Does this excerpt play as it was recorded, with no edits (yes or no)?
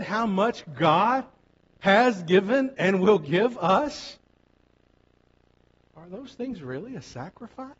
yes